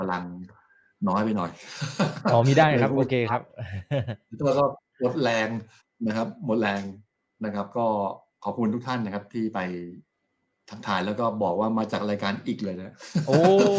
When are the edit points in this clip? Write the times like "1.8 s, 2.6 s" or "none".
none